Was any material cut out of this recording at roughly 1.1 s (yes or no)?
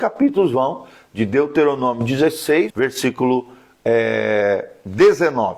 no